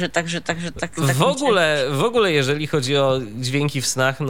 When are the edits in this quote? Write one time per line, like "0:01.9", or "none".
none